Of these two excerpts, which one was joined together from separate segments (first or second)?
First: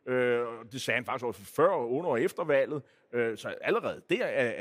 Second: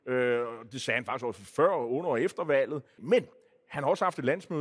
second